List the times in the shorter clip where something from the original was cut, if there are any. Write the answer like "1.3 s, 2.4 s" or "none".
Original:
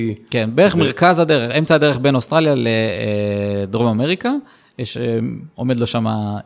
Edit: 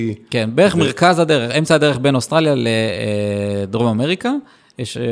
none